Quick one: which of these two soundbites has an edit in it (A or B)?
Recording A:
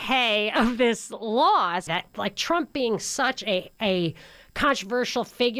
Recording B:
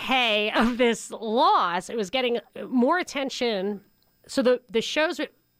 A